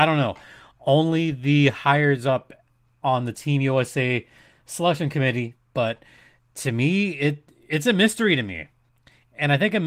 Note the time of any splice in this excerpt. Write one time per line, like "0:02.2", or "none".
0:05.5